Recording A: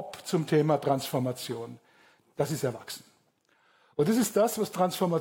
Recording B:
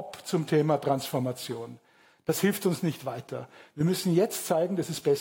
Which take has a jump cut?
A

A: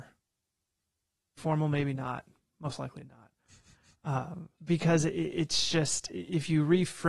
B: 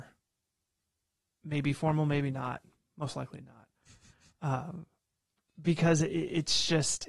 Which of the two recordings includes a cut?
A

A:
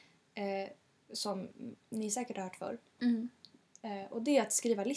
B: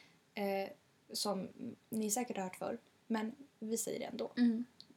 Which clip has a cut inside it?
A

